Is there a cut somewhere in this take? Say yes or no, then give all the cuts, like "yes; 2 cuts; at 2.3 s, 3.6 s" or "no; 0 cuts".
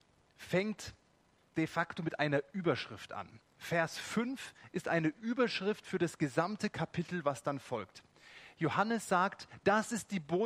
no; 0 cuts